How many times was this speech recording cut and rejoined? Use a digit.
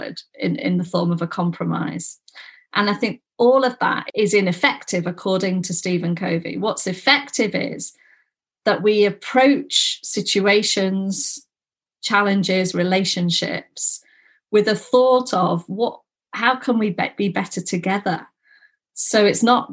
1